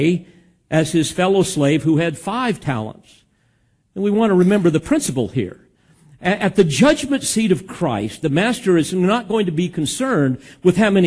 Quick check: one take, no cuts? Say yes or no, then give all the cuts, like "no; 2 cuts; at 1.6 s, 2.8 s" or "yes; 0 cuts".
yes; 0 cuts